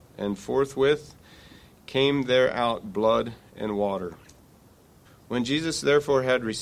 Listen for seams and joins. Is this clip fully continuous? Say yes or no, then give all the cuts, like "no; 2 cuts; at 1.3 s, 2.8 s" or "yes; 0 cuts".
no; 1 cut; at 5.0 s